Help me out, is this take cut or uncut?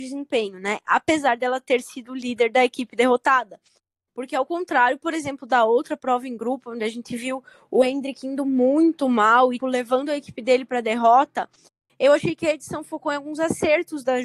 cut